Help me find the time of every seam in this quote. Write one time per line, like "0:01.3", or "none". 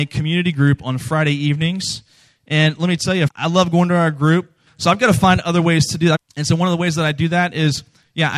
0:03.3
0:04.7
0:06.2